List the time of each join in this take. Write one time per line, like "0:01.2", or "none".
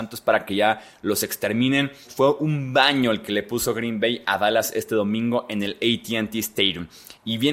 0:02.0